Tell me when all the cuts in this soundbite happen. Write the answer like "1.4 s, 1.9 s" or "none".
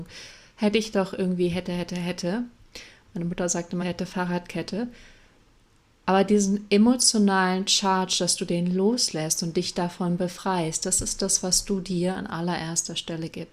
3.8 s